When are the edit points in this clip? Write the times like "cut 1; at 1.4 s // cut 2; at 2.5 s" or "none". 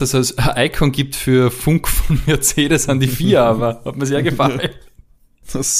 none